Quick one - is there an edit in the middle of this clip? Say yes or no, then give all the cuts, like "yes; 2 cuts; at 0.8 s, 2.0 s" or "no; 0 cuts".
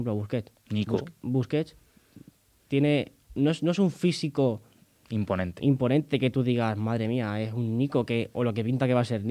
no; 0 cuts